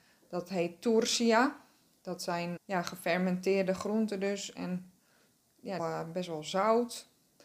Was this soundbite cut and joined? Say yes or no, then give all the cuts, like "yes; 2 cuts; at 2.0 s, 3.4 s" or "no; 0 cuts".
yes; 2 cuts; at 2.6 s, 5.8 s